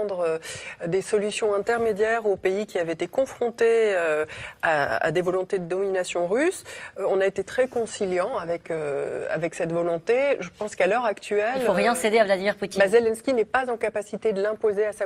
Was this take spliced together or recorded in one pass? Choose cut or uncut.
uncut